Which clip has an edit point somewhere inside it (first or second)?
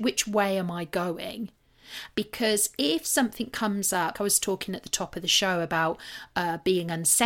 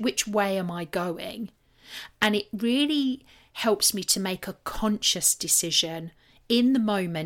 first